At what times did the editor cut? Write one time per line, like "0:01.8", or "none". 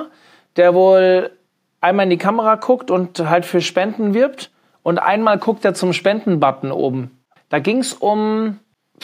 0:07.4